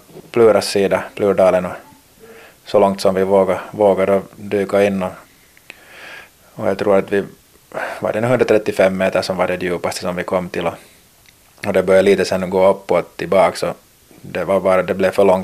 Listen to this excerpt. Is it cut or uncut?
uncut